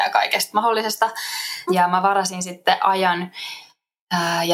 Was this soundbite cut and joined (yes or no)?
yes